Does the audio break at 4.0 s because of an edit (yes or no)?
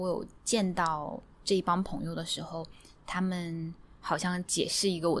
yes